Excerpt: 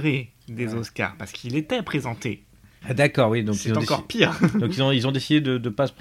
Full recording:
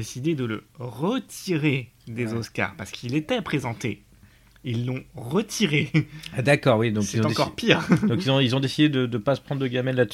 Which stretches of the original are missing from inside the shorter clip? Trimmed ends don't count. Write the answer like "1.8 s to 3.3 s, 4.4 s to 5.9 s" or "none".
4.4 s to 6.3 s